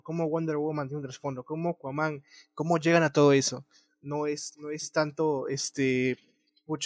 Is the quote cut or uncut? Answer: uncut